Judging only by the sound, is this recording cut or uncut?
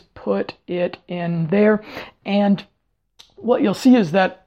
uncut